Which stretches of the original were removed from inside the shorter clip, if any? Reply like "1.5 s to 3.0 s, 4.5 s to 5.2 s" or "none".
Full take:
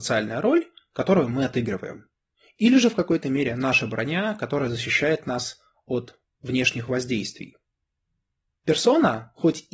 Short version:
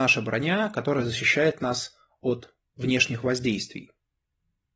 none